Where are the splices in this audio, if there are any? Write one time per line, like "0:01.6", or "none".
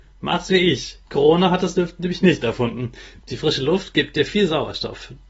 0:01.1
0:03.2